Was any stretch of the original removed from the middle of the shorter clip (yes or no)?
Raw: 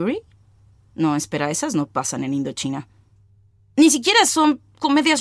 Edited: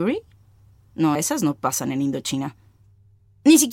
yes